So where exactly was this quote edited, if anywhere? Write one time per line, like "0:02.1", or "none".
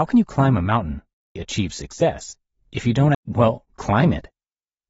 0:01.4
0:03.1